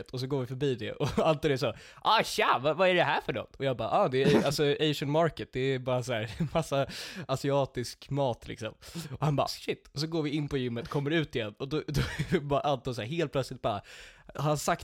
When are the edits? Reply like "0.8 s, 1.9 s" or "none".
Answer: 9.5 s